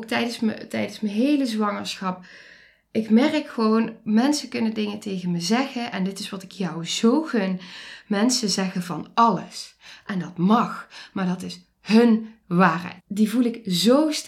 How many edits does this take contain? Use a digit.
1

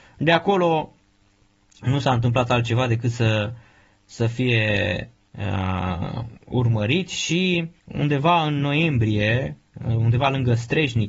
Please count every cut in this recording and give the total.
1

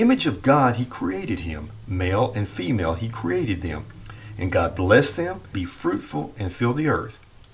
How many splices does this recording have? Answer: 1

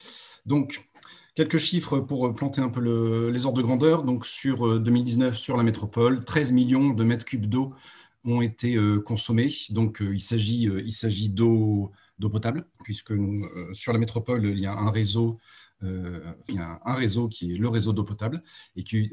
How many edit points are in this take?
2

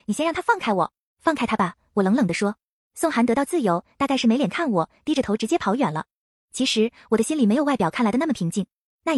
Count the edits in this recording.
1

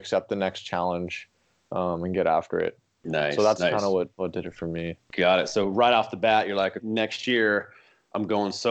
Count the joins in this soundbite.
1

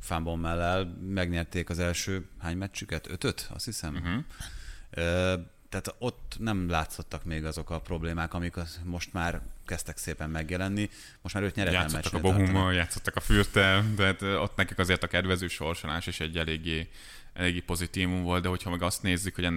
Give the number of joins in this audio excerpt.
0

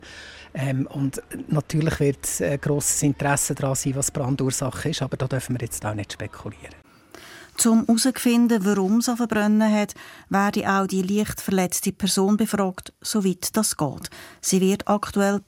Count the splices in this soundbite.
0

